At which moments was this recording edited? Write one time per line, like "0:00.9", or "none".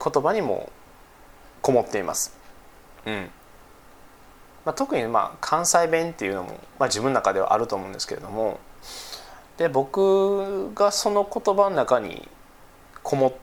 0:03.0